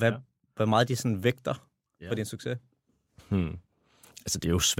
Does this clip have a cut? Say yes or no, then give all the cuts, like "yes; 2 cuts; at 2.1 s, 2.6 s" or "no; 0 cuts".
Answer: no; 0 cuts